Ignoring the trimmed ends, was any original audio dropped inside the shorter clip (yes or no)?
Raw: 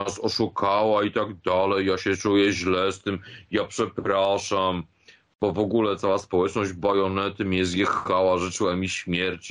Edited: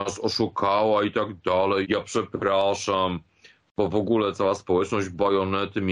yes